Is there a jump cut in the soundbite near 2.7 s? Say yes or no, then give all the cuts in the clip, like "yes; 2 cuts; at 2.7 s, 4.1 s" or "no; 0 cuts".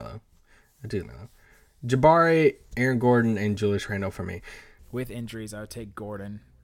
no; 2 cuts; at 1.0 s, 4.8 s